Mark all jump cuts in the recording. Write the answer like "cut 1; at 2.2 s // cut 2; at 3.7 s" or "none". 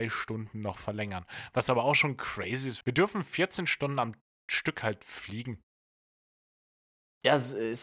cut 1; at 2.8 s